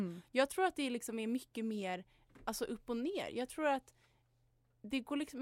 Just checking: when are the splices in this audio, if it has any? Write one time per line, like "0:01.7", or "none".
none